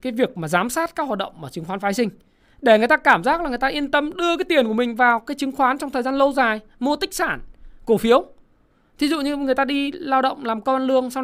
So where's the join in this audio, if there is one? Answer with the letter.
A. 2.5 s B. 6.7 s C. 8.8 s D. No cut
D